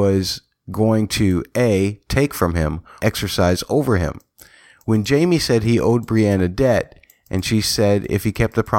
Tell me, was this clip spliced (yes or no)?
yes